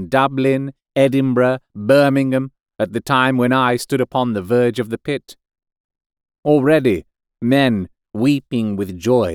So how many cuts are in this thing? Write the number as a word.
one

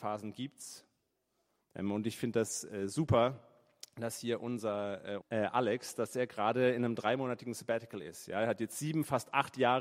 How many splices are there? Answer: two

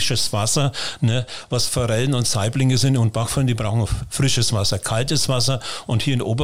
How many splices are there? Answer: zero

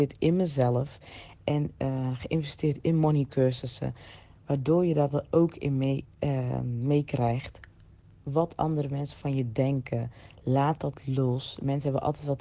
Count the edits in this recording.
zero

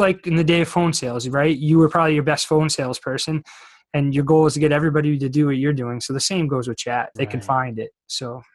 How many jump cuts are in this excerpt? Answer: one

